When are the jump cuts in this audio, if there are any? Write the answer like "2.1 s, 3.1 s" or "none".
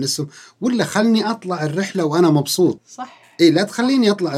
2.8 s